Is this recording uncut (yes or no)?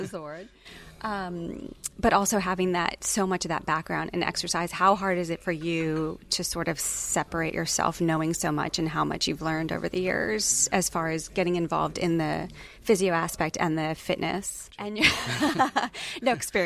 no